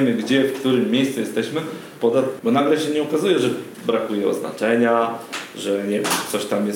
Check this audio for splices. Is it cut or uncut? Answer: cut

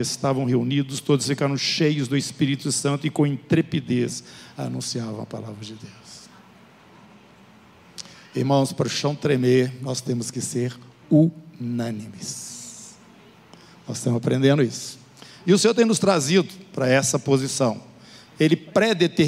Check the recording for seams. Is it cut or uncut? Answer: uncut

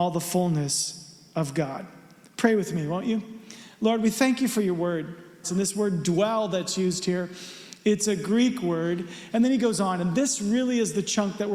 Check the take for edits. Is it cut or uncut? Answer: cut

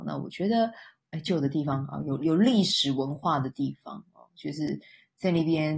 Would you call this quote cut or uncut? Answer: uncut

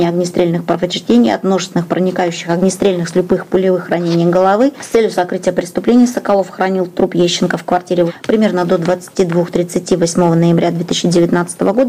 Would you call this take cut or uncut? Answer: uncut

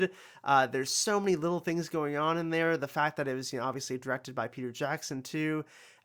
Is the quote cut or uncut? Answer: uncut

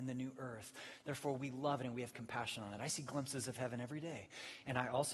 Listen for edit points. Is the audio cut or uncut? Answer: uncut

